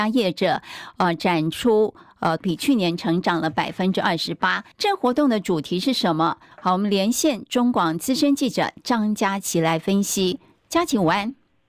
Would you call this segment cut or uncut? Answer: cut